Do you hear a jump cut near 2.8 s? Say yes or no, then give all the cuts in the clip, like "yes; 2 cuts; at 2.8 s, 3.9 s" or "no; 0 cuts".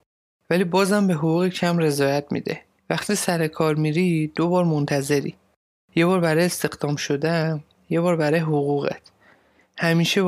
yes; 1 cut; at 2.8 s